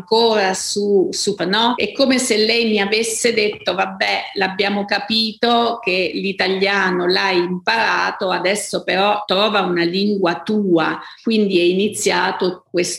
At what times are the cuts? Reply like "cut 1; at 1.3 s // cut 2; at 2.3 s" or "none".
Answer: cut 1; at 1.4 s